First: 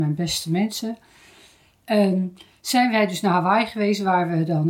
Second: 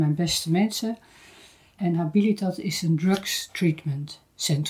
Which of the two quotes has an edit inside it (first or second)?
second